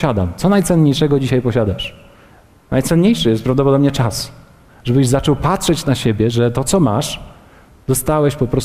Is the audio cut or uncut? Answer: cut